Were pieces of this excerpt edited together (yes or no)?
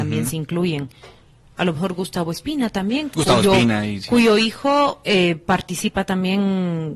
no